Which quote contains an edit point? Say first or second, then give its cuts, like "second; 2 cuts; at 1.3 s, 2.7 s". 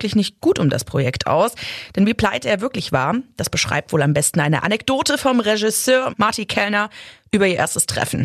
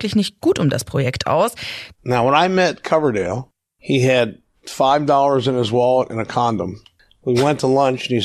second; 1 cut; at 1.9 s